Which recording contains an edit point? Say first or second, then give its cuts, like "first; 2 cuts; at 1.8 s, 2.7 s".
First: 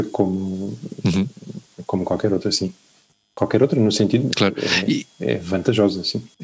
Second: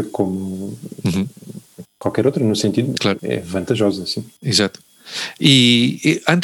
second; 2 cuts; at 1.8 s, 3.2 s